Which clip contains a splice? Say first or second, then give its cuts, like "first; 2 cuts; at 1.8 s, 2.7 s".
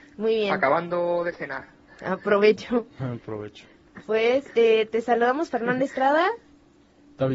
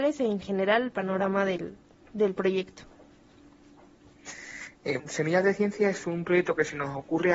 second; 2 cuts; at 5.0 s, 6.0 s